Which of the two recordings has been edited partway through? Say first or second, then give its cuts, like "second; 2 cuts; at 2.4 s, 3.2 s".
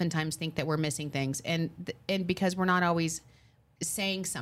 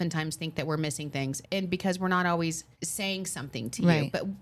second; 2 cuts; at 1.4 s, 2.7 s